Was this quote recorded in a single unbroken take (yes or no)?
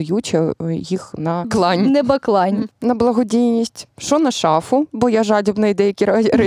no